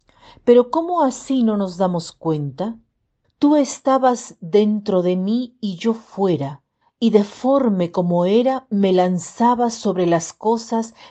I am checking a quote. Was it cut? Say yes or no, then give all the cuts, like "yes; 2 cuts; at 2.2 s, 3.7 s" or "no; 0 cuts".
yes; 2 cuts; at 3.2 s, 6.8 s